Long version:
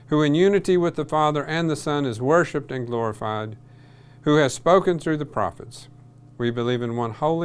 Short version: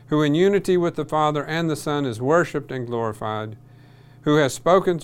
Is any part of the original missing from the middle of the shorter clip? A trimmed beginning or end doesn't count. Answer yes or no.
no